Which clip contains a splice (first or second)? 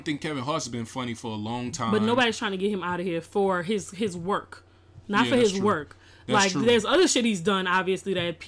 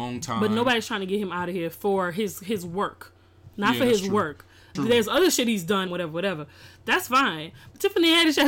second